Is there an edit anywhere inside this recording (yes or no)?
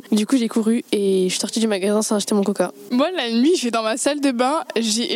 no